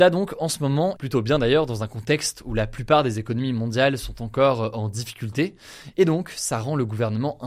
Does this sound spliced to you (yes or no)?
yes